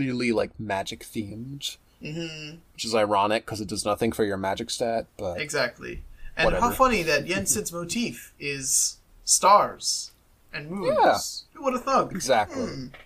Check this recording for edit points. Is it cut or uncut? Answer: cut